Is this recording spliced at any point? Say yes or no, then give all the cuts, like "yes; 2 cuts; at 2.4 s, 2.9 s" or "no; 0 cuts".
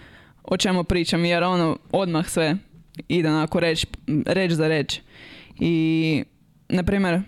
no; 0 cuts